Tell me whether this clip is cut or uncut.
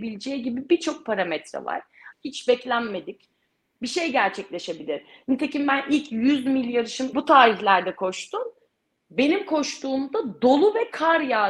cut